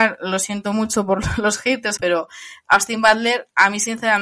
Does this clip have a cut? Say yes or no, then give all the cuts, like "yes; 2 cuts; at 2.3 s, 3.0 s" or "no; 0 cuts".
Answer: yes; 1 cut; at 2.0 s